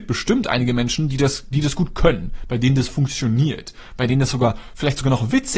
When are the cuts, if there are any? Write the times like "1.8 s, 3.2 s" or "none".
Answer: none